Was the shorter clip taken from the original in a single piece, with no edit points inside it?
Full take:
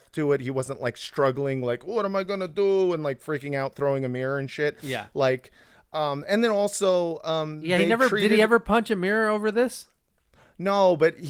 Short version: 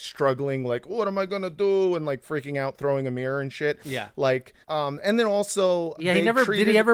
no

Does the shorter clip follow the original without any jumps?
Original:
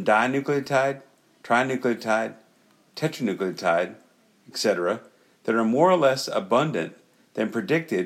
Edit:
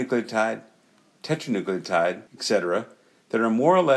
no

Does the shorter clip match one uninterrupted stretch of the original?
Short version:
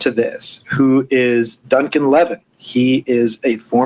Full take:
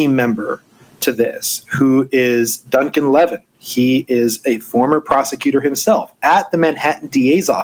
yes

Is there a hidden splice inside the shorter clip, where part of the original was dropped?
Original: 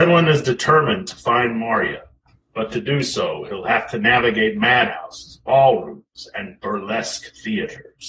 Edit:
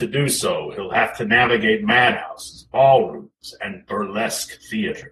no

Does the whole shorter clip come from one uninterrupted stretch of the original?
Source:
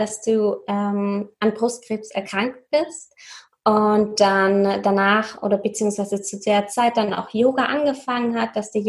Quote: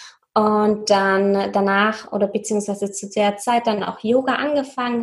yes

